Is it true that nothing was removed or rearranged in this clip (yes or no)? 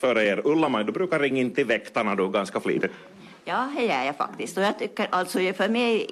no